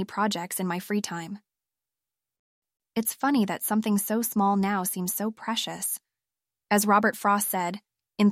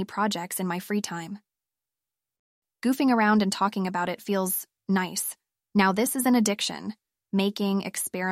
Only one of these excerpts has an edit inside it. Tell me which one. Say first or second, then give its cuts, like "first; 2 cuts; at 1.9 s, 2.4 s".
first; 2 cuts; at 2.8 s, 6.6 s